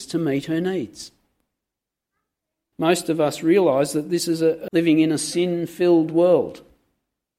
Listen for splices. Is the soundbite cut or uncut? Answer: cut